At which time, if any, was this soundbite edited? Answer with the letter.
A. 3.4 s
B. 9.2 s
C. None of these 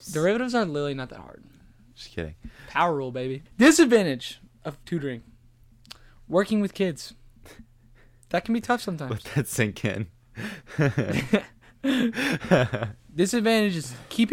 A